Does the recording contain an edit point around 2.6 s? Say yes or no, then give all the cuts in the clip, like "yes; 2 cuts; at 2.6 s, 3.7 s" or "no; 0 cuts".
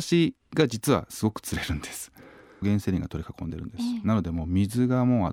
yes; 1 cut; at 2.6 s